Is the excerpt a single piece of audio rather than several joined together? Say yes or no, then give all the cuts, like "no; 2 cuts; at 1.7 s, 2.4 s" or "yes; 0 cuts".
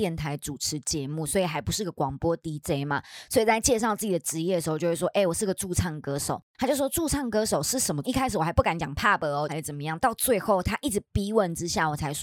no; 2 cuts; at 8.0 s, 9.5 s